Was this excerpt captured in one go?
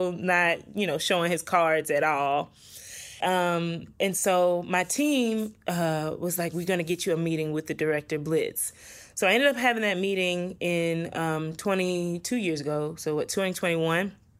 no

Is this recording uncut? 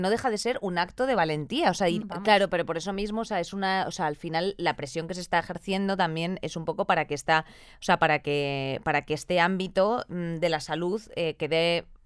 no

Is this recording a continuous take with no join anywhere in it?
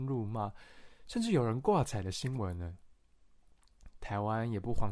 no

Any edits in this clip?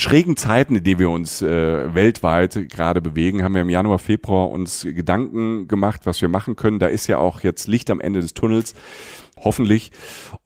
no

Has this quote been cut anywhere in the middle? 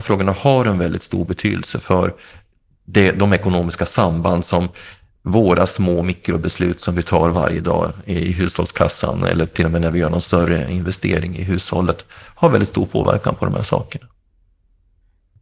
no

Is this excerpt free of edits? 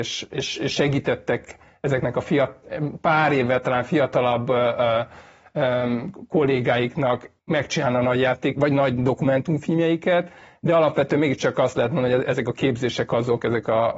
no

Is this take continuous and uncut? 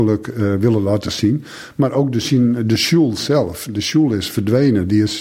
yes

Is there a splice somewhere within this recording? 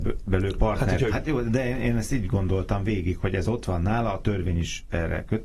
yes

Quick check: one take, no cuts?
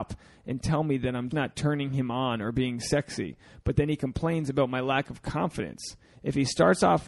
no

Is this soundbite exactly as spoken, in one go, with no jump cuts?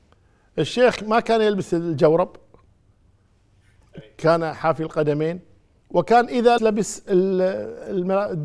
no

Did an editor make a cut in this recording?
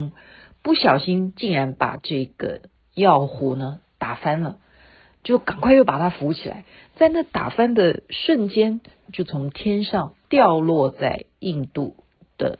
yes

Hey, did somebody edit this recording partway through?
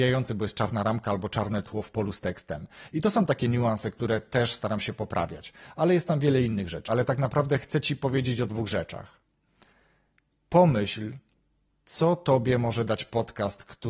yes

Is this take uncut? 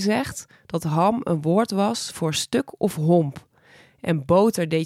yes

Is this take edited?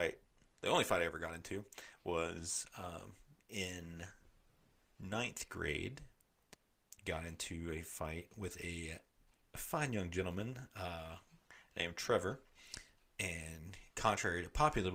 yes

